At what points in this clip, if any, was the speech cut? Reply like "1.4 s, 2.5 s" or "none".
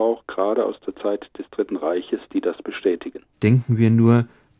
3.3 s